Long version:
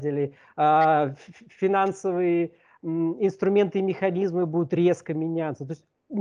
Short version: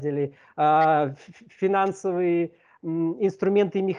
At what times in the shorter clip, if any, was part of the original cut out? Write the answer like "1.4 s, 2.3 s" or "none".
none